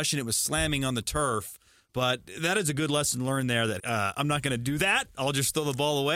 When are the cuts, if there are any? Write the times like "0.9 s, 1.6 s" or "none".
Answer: 3.8 s